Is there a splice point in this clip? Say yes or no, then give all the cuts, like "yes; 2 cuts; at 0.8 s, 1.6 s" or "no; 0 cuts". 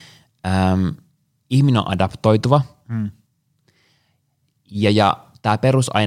no; 0 cuts